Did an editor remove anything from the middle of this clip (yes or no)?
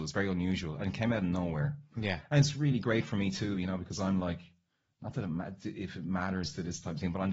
no